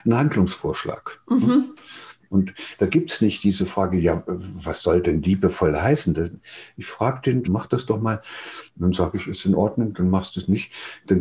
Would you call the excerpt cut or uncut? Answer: cut